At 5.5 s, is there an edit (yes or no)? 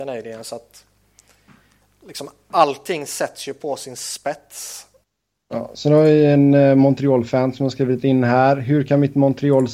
yes